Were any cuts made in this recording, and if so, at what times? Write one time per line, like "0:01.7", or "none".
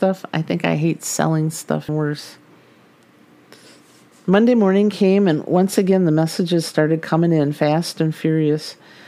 0:01.9